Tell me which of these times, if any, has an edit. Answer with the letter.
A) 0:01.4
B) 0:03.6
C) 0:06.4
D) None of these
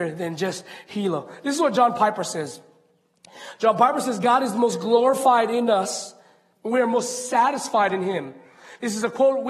D